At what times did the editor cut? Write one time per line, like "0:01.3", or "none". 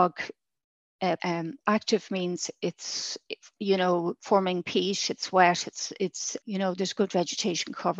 0:01.2
0:06.4